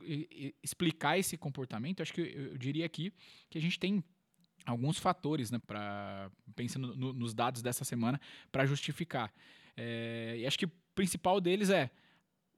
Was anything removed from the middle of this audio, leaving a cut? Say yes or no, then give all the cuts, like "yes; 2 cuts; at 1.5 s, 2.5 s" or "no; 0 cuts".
yes; 1 cut; at 5.6 s